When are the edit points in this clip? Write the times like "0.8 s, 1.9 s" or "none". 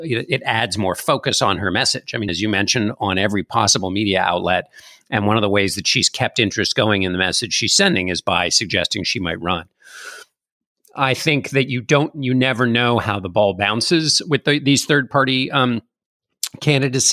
2.3 s